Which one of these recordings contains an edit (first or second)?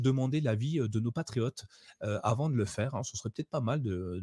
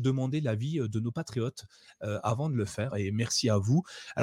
second